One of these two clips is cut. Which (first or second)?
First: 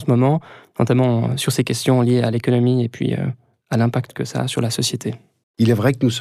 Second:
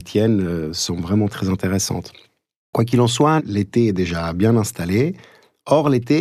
second